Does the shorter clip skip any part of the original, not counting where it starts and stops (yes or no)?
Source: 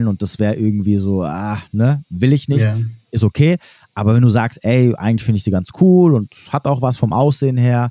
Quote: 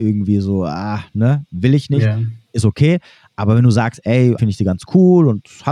yes